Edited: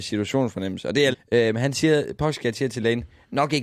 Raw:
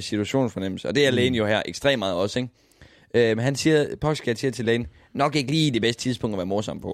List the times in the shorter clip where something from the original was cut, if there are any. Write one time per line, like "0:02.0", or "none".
0:01.1